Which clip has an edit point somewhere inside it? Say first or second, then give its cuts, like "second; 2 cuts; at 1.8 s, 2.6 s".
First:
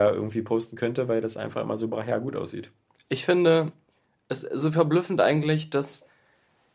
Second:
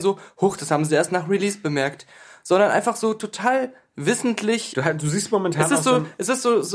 second; 1 cut; at 4.7 s